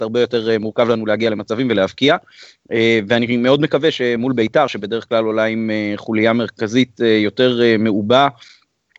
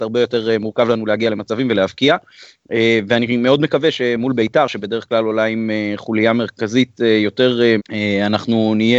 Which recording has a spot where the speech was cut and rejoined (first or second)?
second